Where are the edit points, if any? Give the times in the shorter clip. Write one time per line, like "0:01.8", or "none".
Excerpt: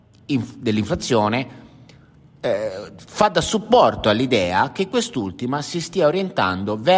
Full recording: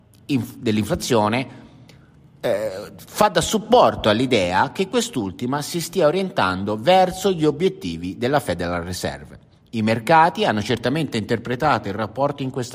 none

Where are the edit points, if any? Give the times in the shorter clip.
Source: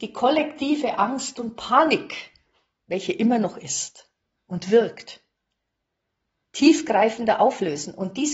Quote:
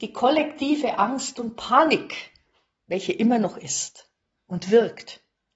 none

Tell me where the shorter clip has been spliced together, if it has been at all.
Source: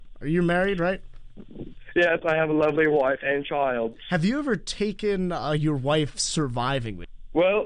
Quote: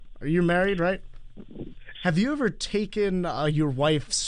0:01.9

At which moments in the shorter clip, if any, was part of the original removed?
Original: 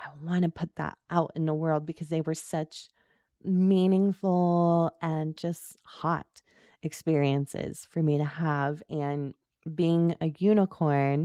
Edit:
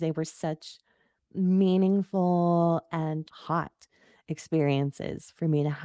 0:03.3

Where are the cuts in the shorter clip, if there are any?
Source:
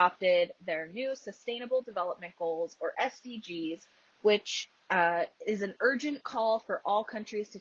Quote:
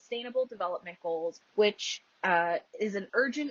0:01.4

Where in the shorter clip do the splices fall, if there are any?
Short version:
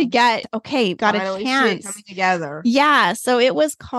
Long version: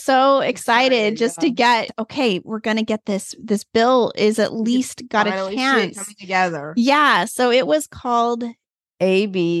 0:01.0

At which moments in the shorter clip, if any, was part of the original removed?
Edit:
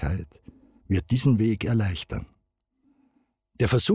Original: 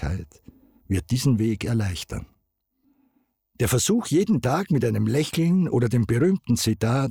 none

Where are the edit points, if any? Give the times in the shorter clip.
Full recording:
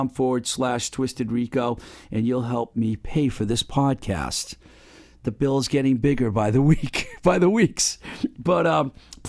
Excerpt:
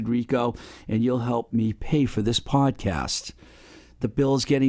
none

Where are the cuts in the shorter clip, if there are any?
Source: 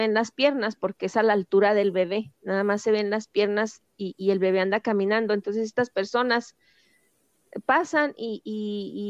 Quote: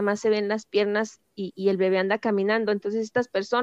none

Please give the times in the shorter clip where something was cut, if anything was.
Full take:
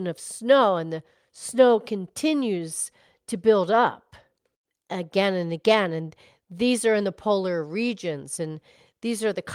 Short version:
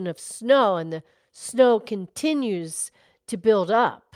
none

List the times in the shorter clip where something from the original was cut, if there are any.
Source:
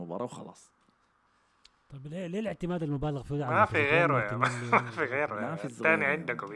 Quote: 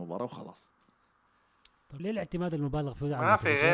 0:02.0

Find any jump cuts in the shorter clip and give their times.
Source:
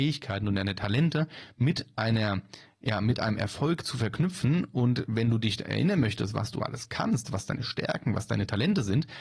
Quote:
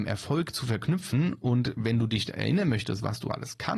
none

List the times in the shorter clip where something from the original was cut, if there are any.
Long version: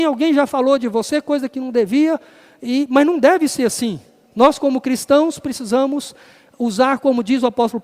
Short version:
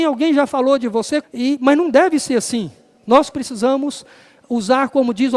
0:01.2
0:03.3

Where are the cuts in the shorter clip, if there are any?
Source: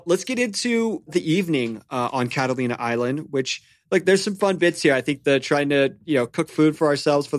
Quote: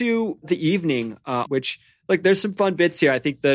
0:01.5

